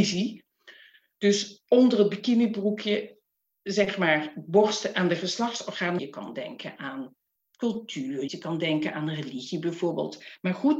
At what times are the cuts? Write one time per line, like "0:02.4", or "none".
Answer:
0:06.0
0:08.3